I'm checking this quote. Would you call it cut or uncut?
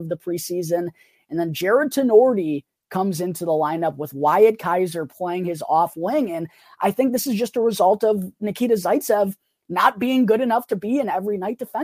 uncut